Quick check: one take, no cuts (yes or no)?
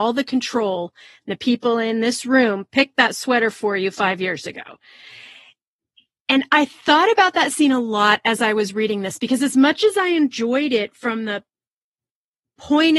yes